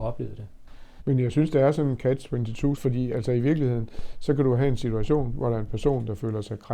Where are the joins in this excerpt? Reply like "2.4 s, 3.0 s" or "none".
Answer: 1.0 s